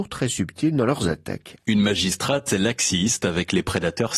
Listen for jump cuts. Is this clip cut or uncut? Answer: cut